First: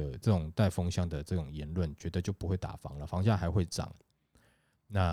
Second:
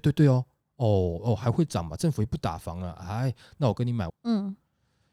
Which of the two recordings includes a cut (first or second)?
second